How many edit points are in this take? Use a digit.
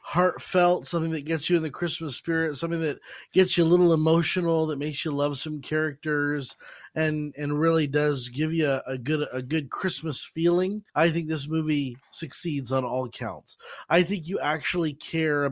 1